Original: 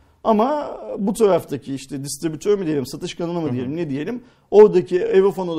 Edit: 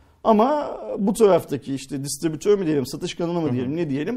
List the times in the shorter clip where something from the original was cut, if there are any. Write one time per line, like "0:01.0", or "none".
none